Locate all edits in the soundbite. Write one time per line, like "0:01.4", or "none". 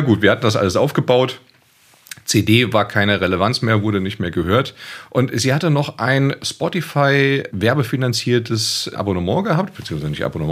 0:07.5
0:08.9